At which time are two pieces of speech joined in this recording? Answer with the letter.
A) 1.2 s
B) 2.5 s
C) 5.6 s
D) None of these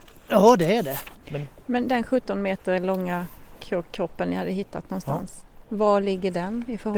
A